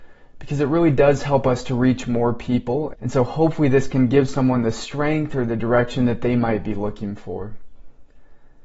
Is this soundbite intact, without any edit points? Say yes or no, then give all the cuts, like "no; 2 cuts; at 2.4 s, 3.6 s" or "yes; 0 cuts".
no; 1 cut; at 2.9 s